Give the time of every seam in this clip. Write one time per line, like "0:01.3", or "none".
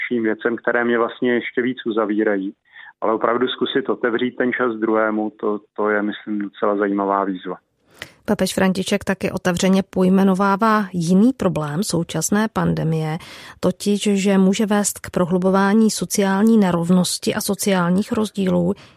none